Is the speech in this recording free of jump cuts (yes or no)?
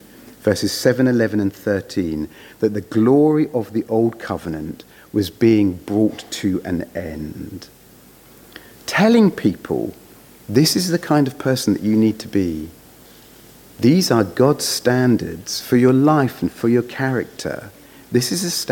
no